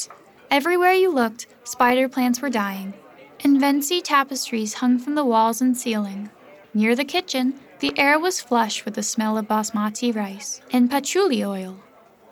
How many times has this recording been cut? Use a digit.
1